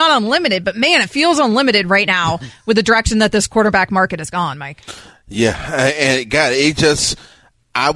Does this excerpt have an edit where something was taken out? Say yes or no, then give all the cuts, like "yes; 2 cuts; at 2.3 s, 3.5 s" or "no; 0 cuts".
no; 0 cuts